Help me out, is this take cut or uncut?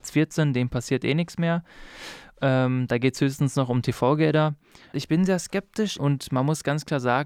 cut